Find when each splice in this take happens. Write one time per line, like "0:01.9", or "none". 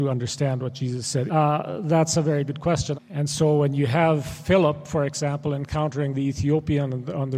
0:01.3
0:02.9